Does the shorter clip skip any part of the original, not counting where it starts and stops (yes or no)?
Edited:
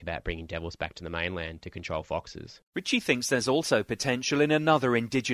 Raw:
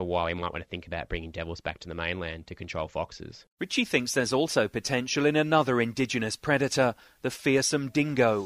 no